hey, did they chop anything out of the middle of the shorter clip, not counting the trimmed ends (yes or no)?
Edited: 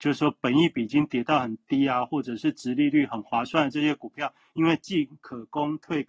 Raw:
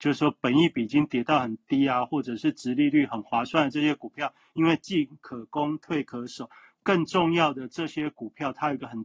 no